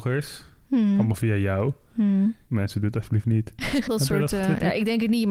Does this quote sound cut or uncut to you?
cut